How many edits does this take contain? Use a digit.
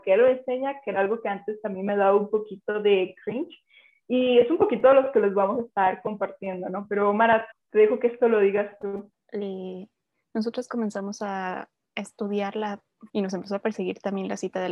3